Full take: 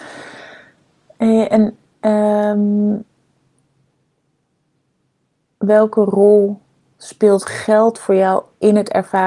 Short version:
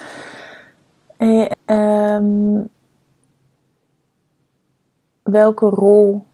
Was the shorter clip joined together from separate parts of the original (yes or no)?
yes